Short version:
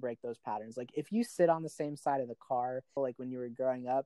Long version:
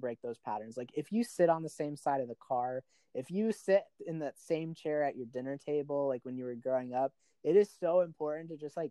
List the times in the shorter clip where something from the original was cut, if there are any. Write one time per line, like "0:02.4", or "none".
0:03.0